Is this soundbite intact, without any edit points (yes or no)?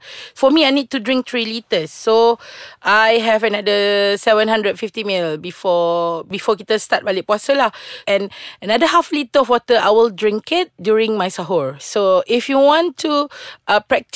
no